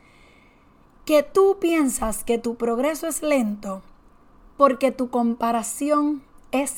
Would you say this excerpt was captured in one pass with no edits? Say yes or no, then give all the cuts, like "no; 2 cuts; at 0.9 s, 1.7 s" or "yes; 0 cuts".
yes; 0 cuts